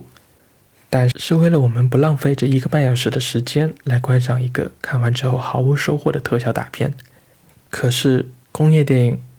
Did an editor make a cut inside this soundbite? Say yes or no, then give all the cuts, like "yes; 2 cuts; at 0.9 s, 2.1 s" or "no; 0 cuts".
yes; 1 cut; at 1.1 s